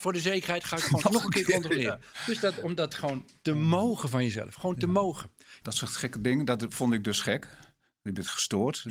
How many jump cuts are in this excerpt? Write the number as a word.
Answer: one